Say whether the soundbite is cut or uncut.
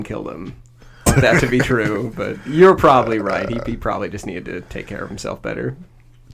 cut